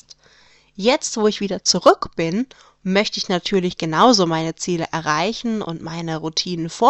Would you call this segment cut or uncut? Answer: uncut